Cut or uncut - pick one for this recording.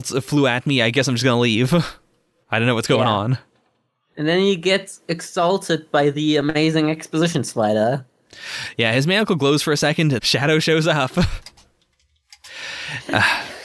cut